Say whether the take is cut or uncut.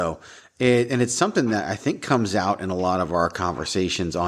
uncut